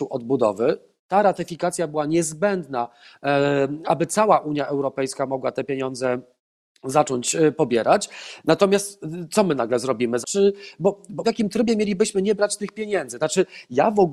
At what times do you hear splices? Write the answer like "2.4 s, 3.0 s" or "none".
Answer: 10.2 s, 11.2 s, 13.2 s